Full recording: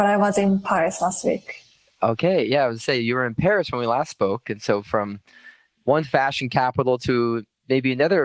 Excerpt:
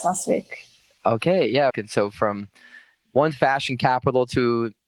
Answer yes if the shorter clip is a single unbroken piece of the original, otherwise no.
no